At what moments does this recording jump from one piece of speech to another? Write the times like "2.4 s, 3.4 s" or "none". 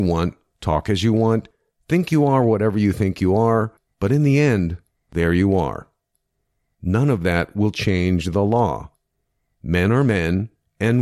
3.9 s